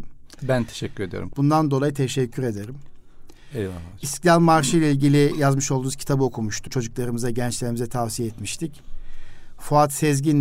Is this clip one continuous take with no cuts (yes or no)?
no